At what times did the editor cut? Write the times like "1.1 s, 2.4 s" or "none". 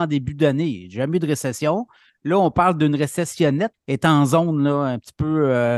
3.7 s